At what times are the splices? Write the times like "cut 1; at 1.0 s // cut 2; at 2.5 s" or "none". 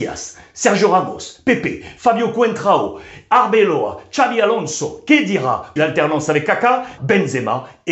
cut 1; at 5.8 s // cut 2; at 7.0 s